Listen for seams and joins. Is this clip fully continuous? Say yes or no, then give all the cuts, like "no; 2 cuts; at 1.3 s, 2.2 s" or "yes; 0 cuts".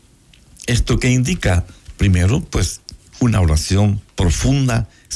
yes; 0 cuts